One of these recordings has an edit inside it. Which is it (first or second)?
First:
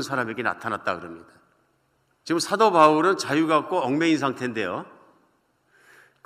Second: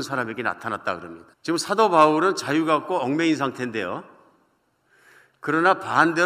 second